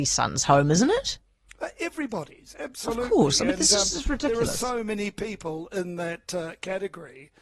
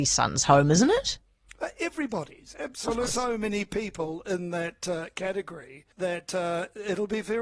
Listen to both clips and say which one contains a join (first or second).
second